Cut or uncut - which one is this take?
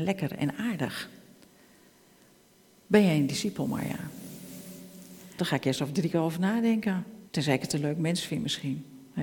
cut